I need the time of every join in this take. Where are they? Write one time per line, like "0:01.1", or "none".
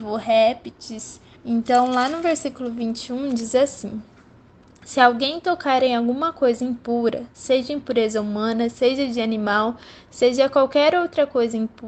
0:01.3